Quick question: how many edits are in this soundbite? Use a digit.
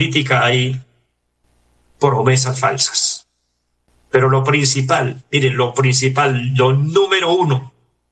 0